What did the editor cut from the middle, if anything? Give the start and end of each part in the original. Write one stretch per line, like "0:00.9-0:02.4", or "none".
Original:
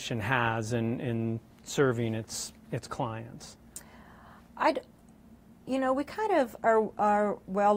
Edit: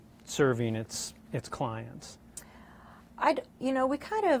0:04.9-0:05.6